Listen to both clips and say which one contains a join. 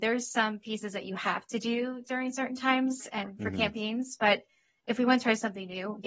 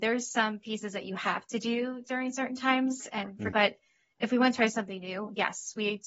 second; 1 cut; at 3.5 s

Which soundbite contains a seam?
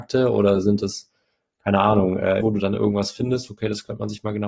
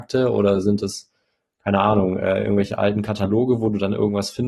first; 2 cuts; at 2.4 s, 3.5 s

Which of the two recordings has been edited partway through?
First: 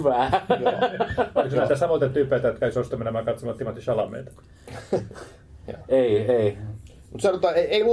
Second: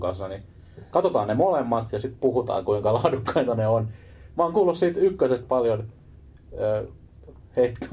second; 1 cut; at 5.4 s

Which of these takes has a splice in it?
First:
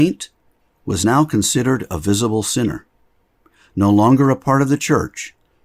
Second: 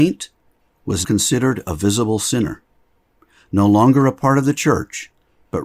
second; 1 cut; at 1.0 s

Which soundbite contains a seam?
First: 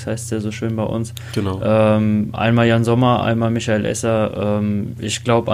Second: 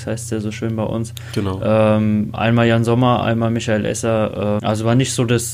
second; 1 cut; at 4.6 s

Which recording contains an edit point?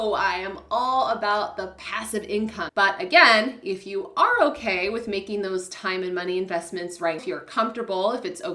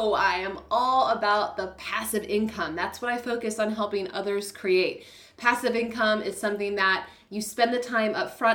first; 2 cuts; at 2.7 s, 7.2 s

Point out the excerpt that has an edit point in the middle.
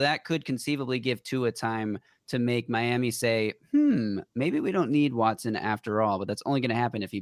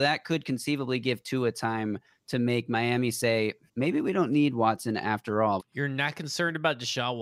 second; 2 cuts; at 3.7 s, 5.6 s

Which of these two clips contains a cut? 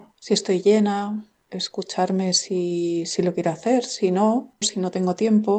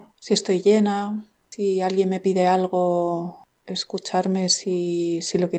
first; 2 cuts; at 1.4 s, 4.6 s

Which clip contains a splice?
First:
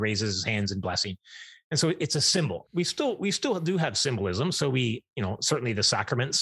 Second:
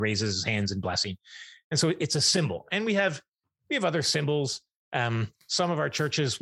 first; 1 cut; at 2.6 s

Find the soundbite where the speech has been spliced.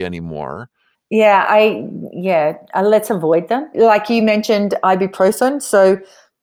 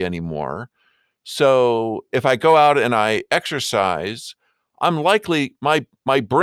first; 2 cuts; at 0.9 s, 3.7 s

